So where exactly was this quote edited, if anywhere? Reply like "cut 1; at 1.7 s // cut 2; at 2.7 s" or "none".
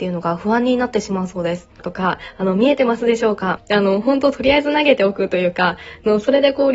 cut 1; at 1.8 s // cut 2; at 3.6 s